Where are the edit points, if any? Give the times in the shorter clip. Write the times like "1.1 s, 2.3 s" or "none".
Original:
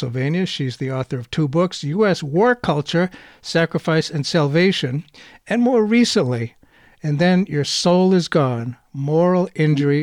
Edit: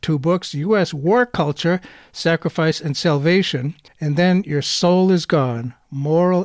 3.9 s